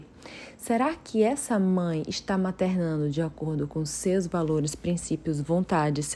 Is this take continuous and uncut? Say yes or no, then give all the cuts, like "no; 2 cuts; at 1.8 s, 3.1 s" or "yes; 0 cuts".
yes; 0 cuts